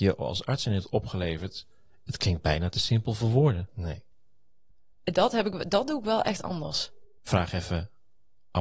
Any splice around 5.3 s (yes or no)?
no